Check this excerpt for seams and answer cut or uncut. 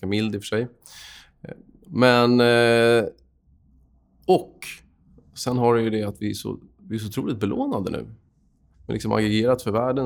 cut